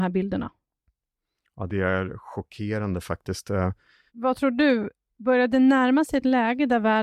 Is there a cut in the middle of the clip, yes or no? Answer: yes